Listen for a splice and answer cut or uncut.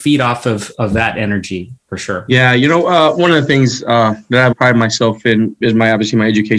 cut